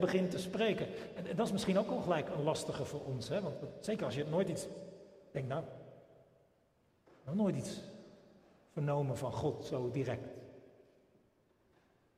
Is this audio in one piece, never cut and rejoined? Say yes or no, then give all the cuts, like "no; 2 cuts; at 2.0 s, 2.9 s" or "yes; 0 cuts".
yes; 0 cuts